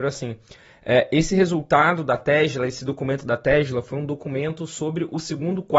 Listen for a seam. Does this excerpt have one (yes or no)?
no